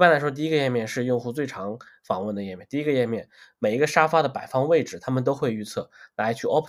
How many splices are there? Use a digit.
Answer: 0